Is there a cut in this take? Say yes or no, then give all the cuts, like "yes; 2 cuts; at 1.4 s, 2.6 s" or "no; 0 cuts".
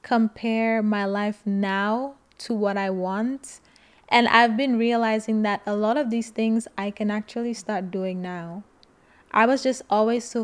no; 0 cuts